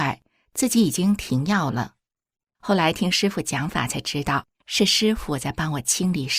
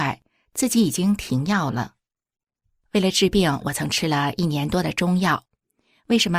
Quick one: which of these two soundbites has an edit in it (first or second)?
first